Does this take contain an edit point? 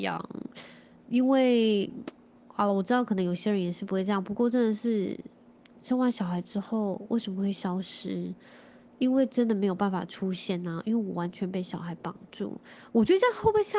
no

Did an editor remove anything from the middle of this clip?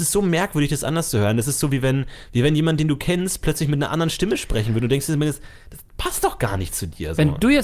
no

